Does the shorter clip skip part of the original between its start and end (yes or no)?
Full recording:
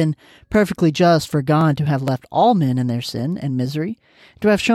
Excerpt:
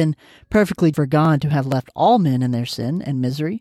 yes